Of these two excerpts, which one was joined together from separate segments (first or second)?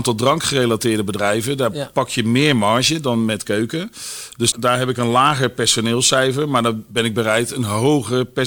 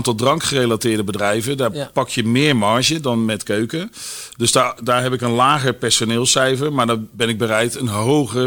first